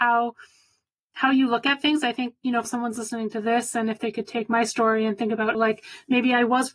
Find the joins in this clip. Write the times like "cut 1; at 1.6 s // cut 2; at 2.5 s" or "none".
cut 1; at 2.6 s // cut 2; at 5.5 s

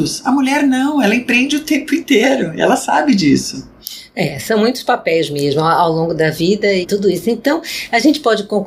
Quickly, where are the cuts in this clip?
cut 1; at 6.8 s

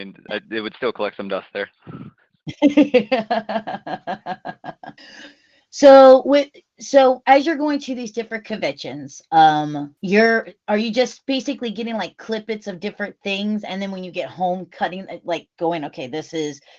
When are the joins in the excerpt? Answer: cut 1; at 5.0 s // cut 2; at 10.0 s

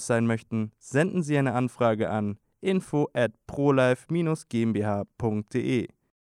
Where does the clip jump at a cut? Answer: none

